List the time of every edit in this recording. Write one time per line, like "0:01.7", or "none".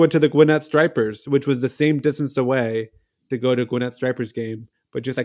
none